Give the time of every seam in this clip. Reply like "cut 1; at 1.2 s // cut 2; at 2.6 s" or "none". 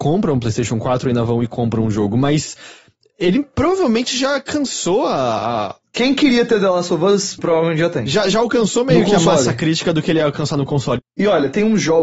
cut 1; at 7.4 s // cut 2; at 11.0 s